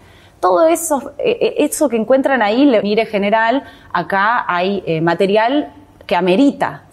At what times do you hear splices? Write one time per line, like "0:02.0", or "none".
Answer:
0:02.8